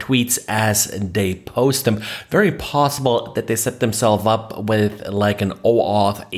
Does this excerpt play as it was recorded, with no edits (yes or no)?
yes